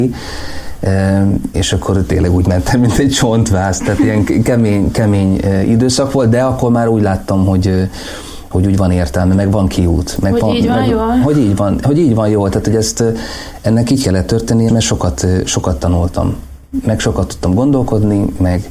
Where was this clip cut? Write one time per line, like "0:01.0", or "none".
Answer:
0:14.7